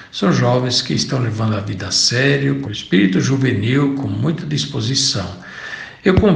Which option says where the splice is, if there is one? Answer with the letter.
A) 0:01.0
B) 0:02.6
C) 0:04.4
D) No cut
B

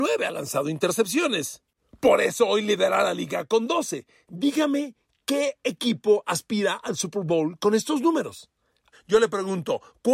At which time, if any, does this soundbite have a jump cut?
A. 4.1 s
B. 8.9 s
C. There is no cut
B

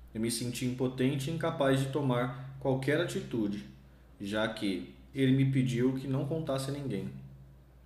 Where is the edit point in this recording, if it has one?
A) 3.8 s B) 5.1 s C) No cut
B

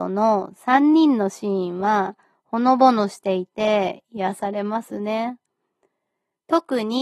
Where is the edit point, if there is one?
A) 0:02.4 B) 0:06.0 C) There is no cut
C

